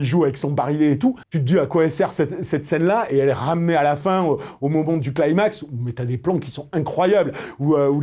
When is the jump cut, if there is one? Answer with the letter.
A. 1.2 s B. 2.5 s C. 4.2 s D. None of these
A